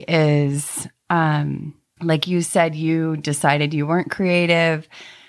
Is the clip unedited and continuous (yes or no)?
no